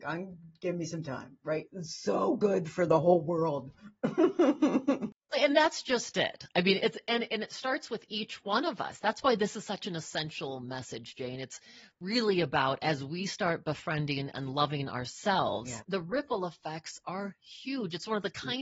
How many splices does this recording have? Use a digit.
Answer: 1